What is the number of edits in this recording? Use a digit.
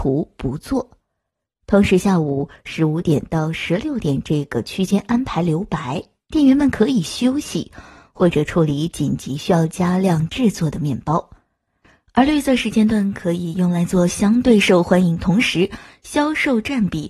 0